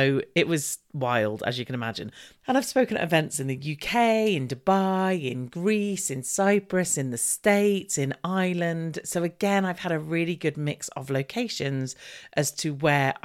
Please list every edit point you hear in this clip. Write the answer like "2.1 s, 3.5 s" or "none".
2.4 s